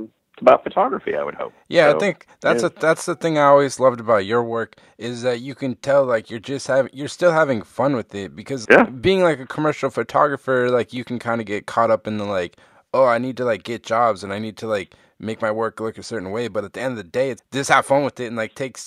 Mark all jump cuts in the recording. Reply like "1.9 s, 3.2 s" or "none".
8.6 s, 17.4 s